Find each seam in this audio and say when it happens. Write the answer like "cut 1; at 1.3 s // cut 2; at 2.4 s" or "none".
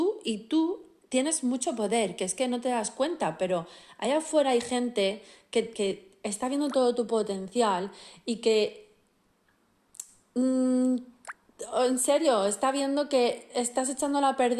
cut 1; at 5.7 s